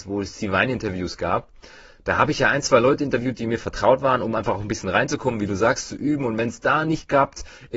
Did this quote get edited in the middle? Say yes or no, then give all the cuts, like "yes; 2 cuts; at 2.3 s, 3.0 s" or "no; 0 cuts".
no; 0 cuts